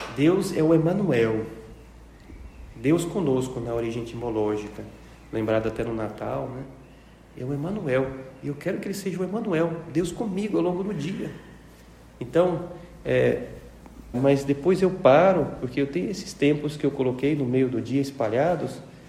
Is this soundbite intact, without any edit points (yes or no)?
no